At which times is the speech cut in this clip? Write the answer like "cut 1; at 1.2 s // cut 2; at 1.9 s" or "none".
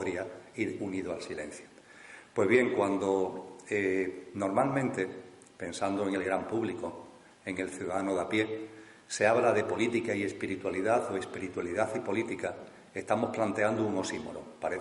none

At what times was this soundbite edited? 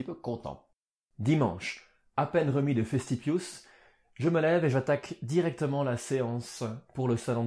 none

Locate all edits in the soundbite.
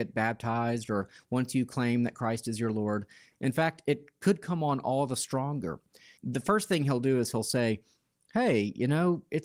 cut 1; at 6.2 s

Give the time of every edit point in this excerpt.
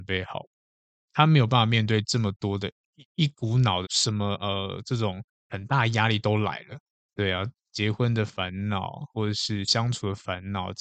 cut 1; at 3.8 s

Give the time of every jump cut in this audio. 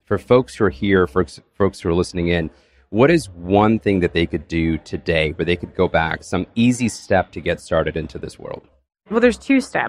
none

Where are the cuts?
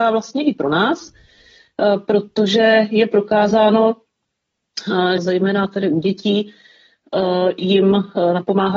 cut 1; at 5.2 s

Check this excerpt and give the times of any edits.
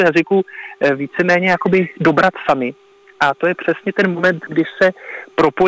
none

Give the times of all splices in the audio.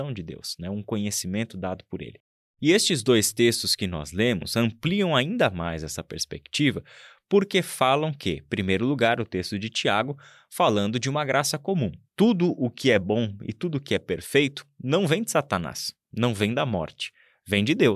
cut 1; at 12.0 s // cut 2; at 16.1 s

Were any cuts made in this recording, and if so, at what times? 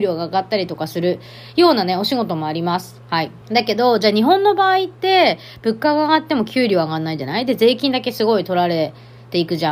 cut 1; at 3.4 s

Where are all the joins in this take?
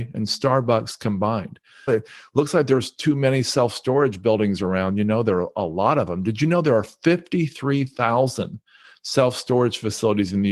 cut 1; at 1.9 s

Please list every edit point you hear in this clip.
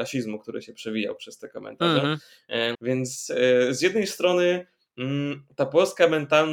cut 1; at 2.7 s

